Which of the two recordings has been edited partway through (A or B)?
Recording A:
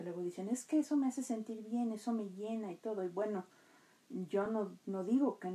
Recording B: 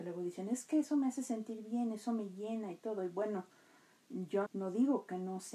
B